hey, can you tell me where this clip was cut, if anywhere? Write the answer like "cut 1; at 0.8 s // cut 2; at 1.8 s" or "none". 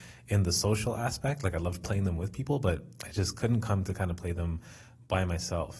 none